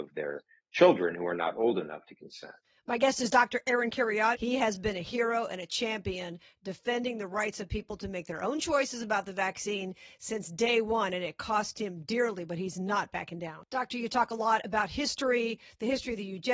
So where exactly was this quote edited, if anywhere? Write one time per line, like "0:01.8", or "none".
0:04.3
0:13.7